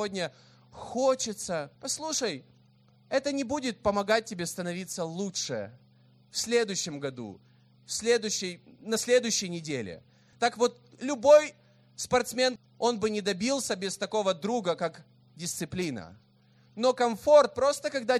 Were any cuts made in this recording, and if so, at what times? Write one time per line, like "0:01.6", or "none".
0:01.8
0:10.3
0:12.6